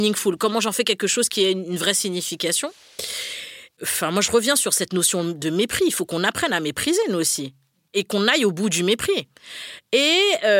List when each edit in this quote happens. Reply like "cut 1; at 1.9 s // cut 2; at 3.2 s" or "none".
none